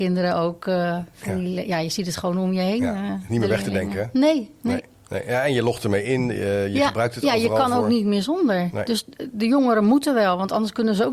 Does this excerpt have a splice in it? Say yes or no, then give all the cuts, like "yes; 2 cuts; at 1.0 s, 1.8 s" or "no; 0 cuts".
no; 0 cuts